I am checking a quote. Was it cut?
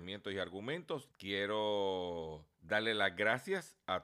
yes; 2 cuts; at 1.1 s, 2.5 s

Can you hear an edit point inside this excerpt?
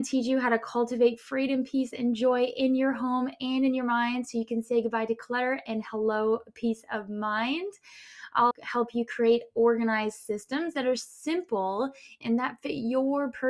yes; 2 cuts; at 8.5 s, 12.2 s

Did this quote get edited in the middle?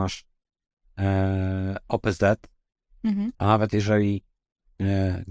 yes; 1 cut; at 3.3 s

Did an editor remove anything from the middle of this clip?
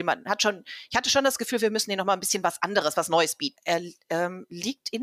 yes; 1 cut; at 3.6 s

